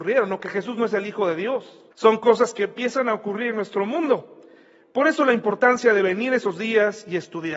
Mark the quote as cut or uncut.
cut